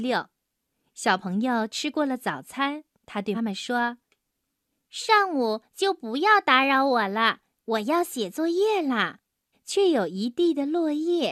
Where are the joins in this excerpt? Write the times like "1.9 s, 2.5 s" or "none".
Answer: 3.3 s, 9.5 s

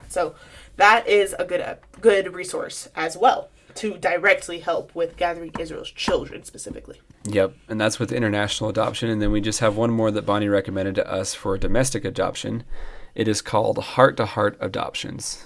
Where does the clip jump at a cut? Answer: none

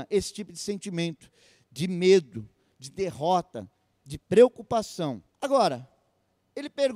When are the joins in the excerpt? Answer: 5.3 s

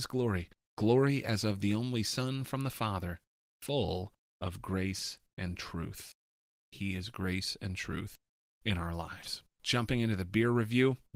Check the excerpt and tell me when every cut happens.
6.7 s

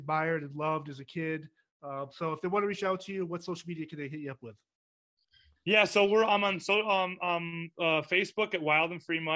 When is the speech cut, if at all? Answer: none

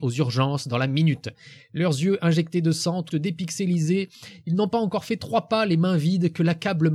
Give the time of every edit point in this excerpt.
3.1 s

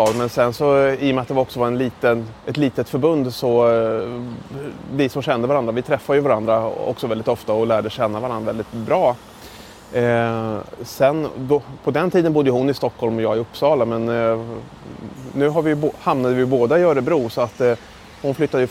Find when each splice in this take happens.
2.4 s

